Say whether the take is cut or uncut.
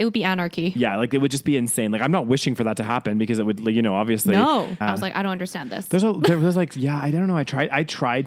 cut